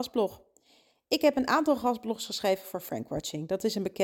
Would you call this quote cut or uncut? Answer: uncut